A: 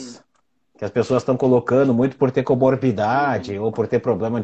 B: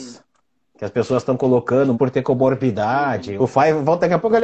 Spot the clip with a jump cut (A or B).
B